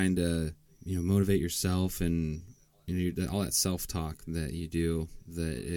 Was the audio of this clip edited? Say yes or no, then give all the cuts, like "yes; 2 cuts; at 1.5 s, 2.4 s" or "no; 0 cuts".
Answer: no; 0 cuts